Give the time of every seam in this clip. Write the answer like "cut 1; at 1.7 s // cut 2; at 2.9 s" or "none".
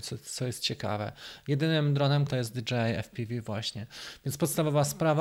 cut 1; at 2.3 s